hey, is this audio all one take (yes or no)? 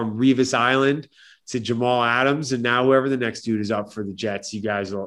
yes